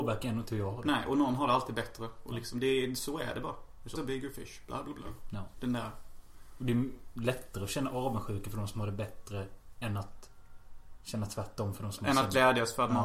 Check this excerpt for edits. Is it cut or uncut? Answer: cut